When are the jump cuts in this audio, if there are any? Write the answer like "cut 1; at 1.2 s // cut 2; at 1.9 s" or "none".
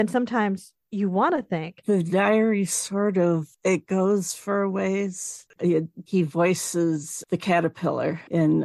cut 1; at 1.8 s // cut 2; at 5.6 s

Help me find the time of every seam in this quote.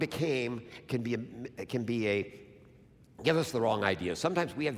none

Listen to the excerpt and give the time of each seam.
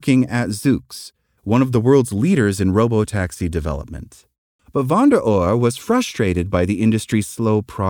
cut 1; at 4.6 s

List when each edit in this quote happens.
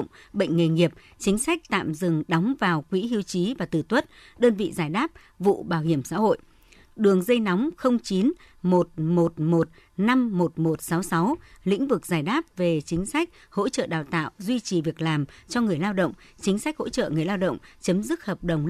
cut 1; at 6.8 s

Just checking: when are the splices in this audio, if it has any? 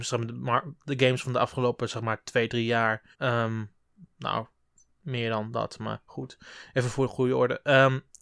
cut 1; at 3.1 s

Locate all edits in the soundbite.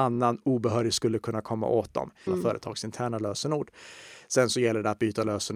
cut 1; at 2.3 s

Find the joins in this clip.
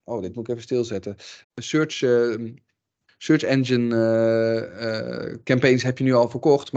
cut 1; at 1.4 s

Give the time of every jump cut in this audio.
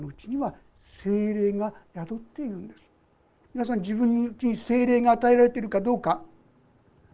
cut 1; at 3.4 s

